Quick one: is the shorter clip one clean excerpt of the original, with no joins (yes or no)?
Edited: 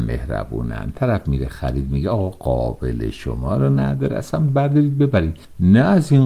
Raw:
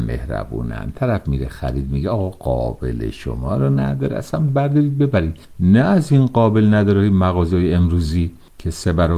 yes